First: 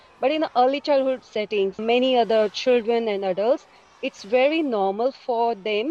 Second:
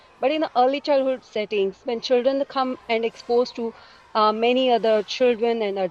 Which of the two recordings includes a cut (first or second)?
first